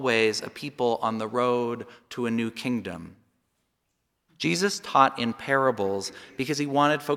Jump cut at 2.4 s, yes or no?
no